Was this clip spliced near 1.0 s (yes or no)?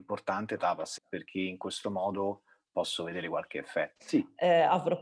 yes